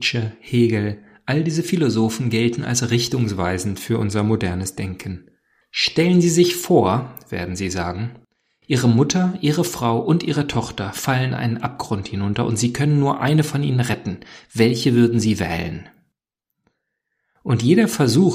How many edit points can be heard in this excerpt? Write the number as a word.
one